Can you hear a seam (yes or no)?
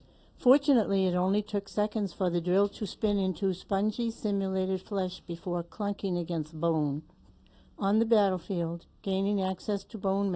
no